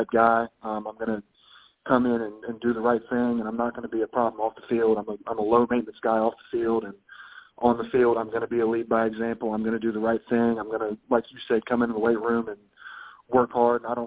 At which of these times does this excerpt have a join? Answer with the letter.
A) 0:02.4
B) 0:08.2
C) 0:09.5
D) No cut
D